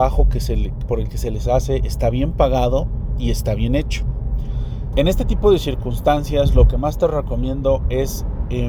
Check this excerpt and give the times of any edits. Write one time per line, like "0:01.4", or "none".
0:04.9

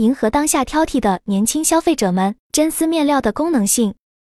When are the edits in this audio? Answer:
0:02.4

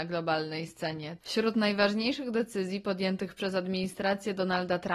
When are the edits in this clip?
0:01.2

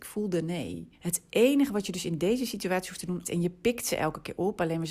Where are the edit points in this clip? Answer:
0:01.0
0:03.2

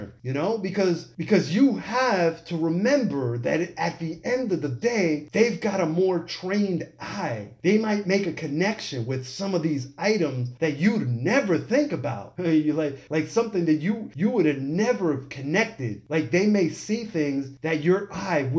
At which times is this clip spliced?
none

